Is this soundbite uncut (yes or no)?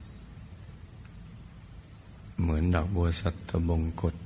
yes